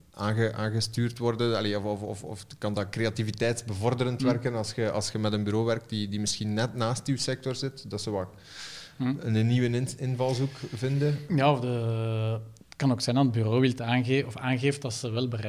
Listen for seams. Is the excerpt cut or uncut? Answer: cut